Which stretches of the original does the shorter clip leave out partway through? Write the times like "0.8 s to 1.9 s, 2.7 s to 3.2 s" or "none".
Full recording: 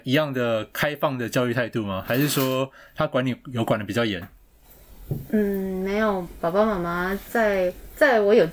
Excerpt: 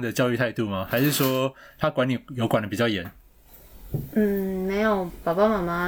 none